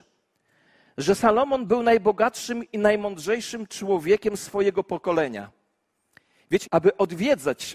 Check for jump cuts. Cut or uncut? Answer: cut